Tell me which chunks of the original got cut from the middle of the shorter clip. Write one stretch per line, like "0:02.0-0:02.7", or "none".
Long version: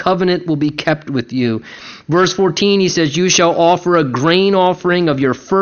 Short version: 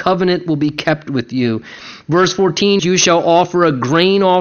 0:02.8-0:03.1